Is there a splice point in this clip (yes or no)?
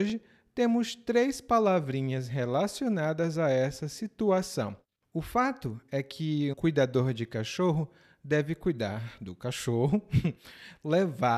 yes